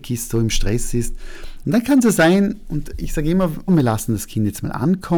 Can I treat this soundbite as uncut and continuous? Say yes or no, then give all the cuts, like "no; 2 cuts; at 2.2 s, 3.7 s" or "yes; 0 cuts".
no; 2 cuts; at 1.6 s, 3.7 s